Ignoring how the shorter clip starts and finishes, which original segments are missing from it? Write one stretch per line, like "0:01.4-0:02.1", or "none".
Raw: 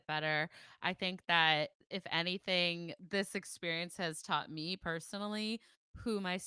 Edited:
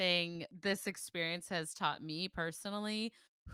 none